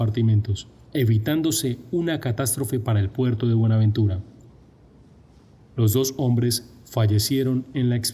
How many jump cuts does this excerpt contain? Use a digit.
0